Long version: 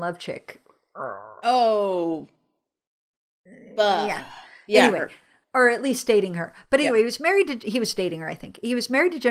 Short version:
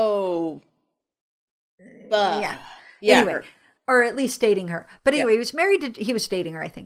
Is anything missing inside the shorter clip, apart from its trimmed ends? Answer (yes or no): no